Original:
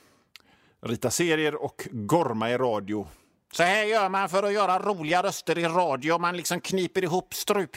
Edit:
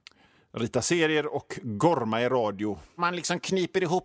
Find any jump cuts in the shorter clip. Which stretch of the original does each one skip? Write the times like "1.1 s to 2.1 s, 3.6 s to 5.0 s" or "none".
3.3 s to 6.2 s